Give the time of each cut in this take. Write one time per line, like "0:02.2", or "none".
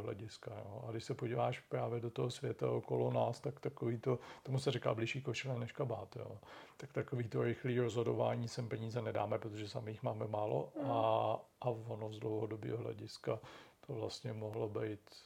0:11.5